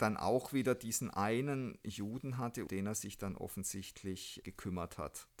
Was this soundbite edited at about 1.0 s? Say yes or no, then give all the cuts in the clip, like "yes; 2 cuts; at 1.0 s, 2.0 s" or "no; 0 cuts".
no; 1 cut; at 2.7 s